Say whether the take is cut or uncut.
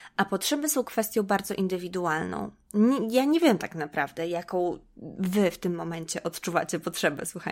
uncut